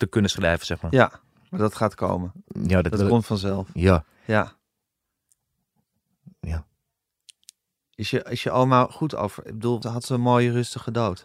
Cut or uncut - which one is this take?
cut